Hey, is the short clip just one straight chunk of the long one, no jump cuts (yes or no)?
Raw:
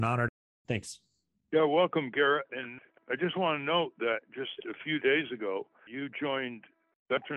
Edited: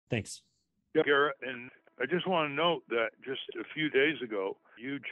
no